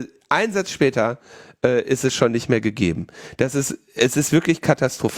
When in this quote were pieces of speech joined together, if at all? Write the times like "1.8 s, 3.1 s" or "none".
none